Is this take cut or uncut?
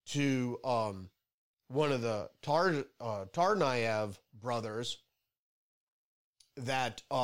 uncut